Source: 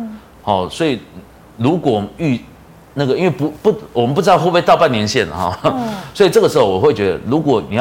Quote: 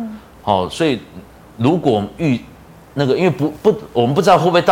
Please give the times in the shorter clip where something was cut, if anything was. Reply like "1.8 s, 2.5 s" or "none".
none